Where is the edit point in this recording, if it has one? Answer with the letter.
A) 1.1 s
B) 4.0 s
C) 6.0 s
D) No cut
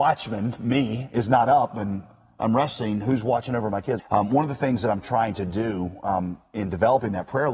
B